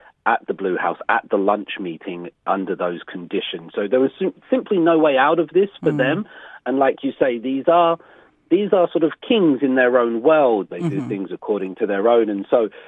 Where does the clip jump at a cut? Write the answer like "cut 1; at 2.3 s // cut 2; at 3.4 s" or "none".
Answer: cut 1; at 10.7 s